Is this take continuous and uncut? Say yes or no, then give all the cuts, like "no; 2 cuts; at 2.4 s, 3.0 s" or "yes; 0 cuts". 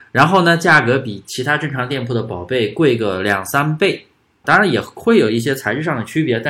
no; 1 cut; at 4.4 s